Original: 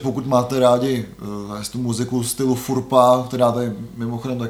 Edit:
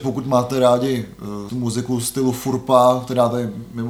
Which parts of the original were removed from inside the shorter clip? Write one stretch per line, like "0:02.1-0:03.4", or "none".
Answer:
0:01.5-0:01.7